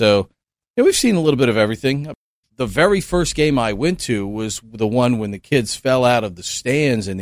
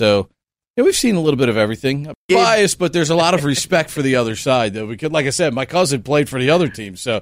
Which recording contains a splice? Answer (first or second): second